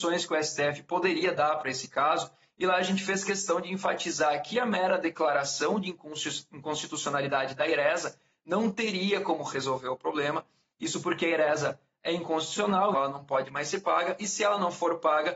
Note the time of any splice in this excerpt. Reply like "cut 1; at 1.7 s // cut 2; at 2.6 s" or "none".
cut 1; at 12.9 s

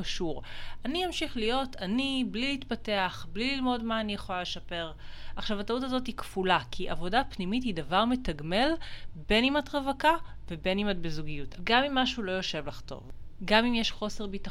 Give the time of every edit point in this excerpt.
cut 1; at 11.6 s

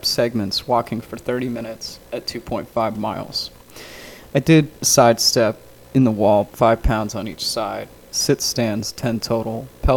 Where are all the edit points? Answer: cut 1; at 6.5 s // cut 2; at 8.1 s

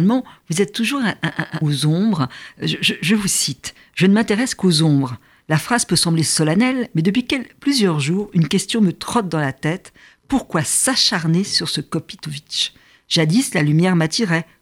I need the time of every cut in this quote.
cut 1; at 1.6 s

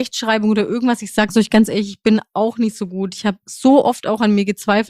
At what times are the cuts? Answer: none

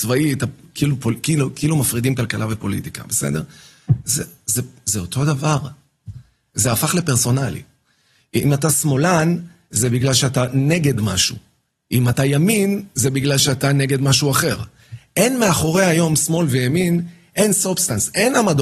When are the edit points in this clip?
none

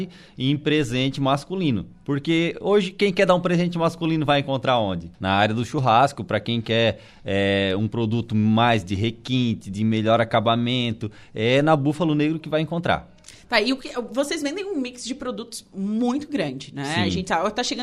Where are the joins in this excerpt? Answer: cut 1; at 5.1 s

